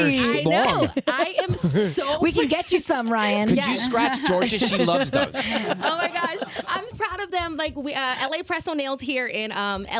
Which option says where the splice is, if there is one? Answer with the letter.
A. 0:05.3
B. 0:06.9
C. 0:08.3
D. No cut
B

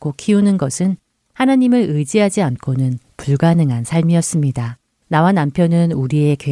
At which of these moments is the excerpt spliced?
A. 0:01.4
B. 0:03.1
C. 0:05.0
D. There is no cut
C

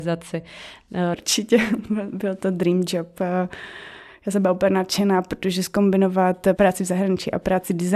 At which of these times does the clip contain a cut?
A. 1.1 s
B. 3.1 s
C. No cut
A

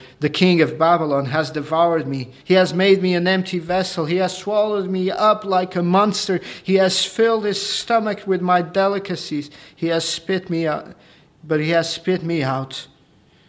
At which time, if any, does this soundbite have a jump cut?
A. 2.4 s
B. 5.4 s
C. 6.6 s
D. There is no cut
A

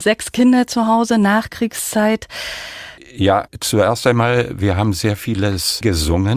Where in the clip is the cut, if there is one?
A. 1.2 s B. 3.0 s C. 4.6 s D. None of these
B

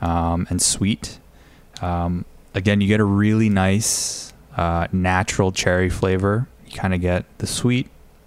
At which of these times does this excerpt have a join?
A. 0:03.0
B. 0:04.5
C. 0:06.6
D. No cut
C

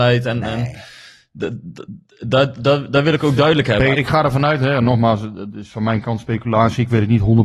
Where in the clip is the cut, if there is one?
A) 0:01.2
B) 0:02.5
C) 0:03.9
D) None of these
C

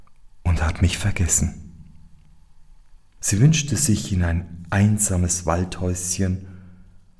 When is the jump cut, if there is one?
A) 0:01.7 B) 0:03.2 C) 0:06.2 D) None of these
B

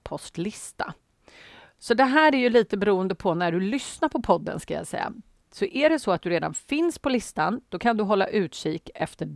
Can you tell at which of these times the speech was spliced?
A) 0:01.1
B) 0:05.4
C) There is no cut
B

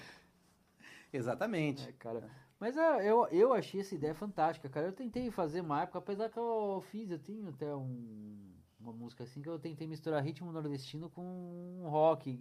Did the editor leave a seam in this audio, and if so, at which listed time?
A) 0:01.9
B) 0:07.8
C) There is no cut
C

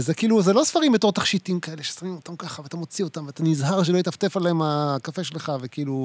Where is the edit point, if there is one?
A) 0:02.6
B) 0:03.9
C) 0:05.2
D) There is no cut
D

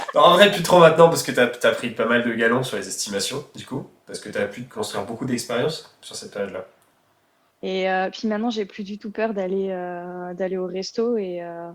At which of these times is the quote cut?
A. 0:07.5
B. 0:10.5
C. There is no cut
A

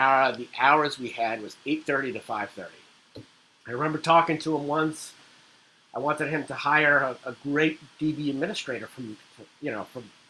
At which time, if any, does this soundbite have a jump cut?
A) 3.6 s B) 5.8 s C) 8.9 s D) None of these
A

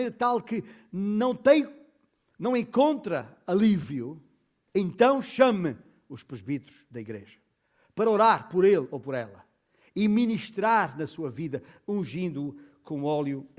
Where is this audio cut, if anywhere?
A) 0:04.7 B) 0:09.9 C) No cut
A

